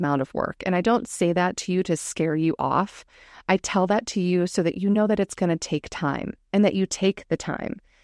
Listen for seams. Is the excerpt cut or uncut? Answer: uncut